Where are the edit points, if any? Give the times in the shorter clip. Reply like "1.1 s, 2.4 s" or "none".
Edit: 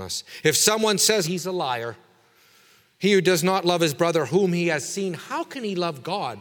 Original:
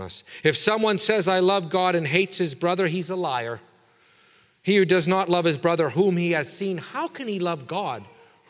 1.2 s